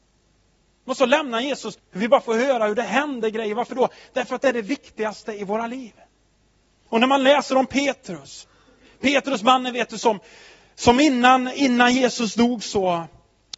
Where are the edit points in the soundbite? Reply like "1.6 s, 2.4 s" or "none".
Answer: 1.8 s